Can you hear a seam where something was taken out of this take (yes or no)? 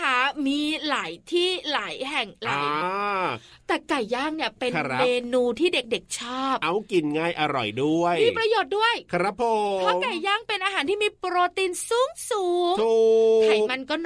yes